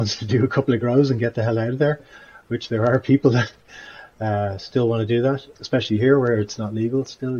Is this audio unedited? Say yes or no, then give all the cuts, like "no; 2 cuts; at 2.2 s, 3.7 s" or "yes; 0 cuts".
no; 1 cut; at 5.5 s